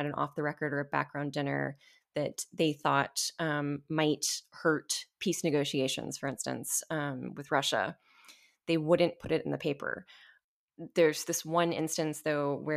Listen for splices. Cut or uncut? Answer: uncut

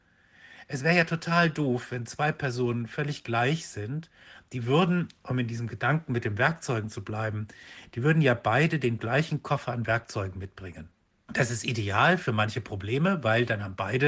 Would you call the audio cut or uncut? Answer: uncut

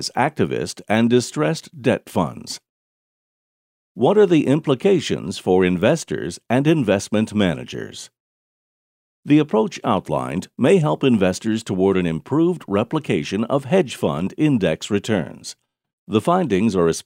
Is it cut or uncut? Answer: uncut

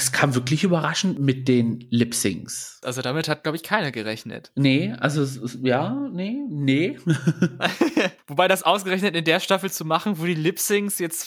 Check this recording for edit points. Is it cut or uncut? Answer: cut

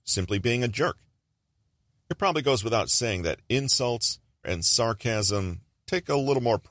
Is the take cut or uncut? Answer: cut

